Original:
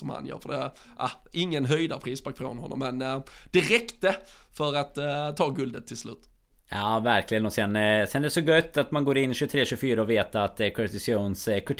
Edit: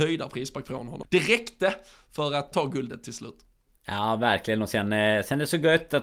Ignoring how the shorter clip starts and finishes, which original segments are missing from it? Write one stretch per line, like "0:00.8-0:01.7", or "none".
0:02.7-0:03.4
0:04.9-0:05.4